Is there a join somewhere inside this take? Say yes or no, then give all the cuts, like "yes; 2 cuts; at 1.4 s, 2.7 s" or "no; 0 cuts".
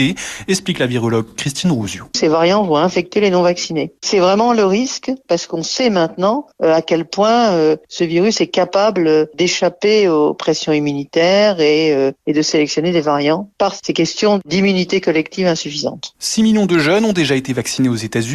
no; 0 cuts